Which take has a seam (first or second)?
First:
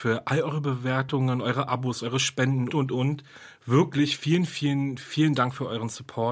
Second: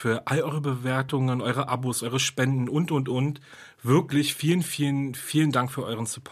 first